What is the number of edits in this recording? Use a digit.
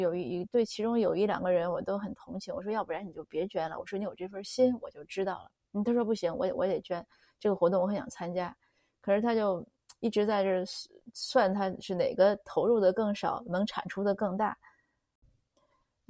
0